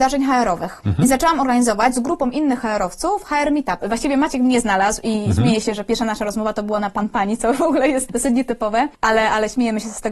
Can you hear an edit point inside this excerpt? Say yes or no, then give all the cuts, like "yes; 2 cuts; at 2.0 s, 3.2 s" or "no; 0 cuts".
yes; 1 cut; at 3.8 s